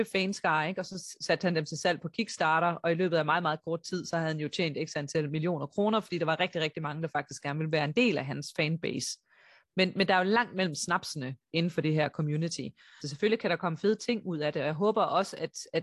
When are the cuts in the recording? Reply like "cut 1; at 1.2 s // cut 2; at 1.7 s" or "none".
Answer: cut 1; at 13.0 s

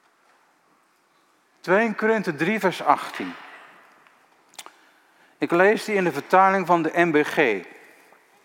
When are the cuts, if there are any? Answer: none

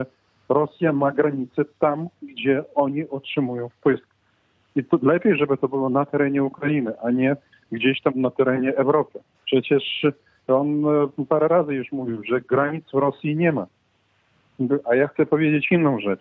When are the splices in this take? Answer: cut 1; at 8.1 s // cut 2; at 9.3 s

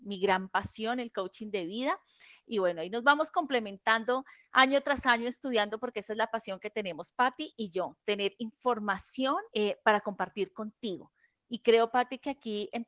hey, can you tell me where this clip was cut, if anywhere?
cut 1; at 2.4 s // cut 2; at 9.5 s

